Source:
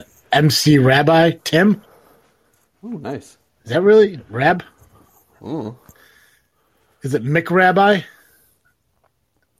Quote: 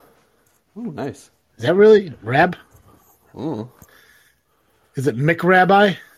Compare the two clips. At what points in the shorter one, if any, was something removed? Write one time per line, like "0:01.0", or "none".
none